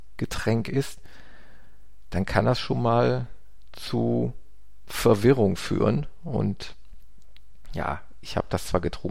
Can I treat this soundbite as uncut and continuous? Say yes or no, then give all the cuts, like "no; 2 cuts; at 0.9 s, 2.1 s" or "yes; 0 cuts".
yes; 0 cuts